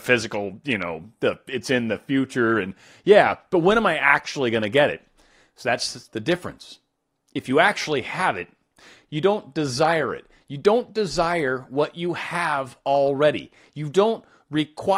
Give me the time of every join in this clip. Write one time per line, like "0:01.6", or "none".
none